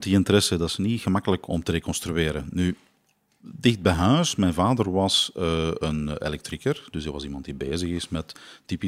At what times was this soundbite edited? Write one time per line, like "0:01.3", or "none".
none

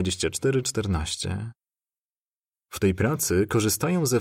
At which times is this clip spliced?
none

